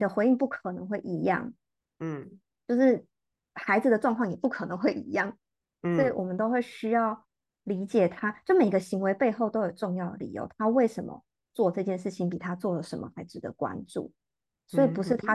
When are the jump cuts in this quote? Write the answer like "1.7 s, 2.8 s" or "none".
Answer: none